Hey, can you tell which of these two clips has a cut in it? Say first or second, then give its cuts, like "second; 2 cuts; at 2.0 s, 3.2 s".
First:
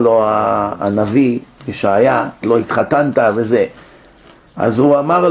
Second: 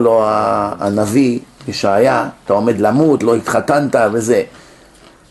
first; 1 cut; at 2.4 s